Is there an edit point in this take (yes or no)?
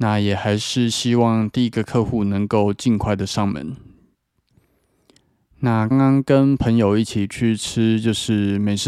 yes